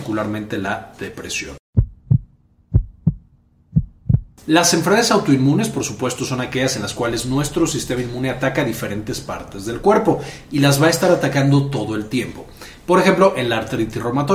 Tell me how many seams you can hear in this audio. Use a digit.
0